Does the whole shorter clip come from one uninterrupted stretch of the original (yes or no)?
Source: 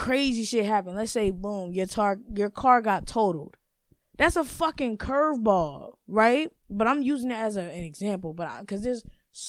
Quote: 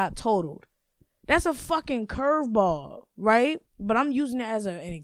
yes